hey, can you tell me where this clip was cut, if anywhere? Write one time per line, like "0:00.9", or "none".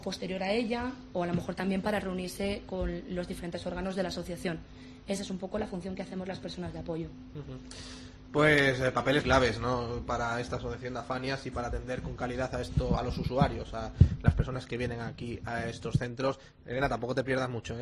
0:09.2